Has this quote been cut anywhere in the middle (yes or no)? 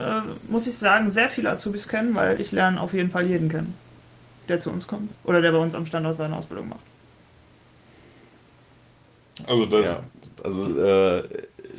yes